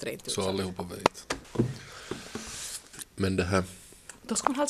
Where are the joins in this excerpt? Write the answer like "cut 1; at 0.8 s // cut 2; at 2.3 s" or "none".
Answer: cut 1; at 3.0 s